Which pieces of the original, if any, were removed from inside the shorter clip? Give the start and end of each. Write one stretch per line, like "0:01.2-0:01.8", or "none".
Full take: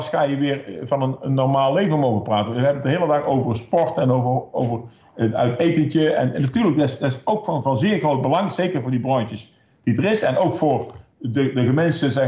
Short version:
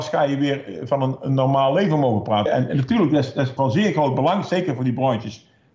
0:02.5-0:06.1
0:07.2-0:07.6